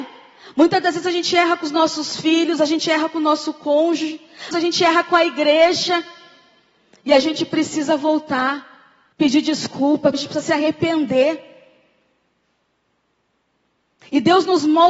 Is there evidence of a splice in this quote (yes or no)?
yes